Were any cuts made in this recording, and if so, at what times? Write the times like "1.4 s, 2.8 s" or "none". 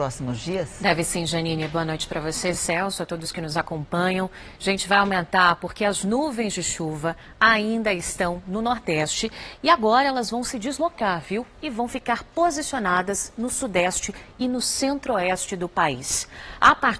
none